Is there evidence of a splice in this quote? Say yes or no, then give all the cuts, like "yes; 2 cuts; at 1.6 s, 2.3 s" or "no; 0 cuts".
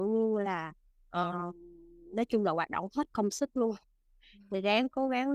no; 0 cuts